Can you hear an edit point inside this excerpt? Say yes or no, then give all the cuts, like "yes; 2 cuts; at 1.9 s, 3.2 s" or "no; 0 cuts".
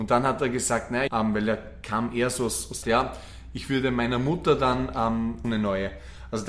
yes; 3 cuts; at 1.1 s, 2.8 s, 5.4 s